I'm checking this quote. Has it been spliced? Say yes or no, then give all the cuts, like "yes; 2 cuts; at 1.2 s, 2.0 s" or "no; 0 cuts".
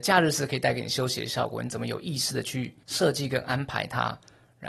yes; 1 cut; at 2.8 s